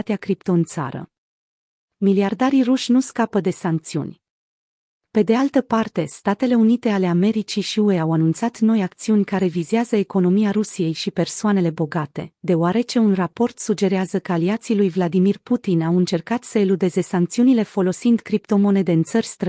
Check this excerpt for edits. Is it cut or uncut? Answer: uncut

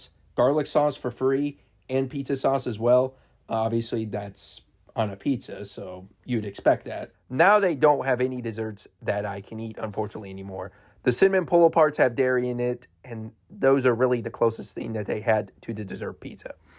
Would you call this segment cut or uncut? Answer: cut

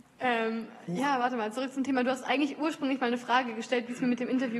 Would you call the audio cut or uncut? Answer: uncut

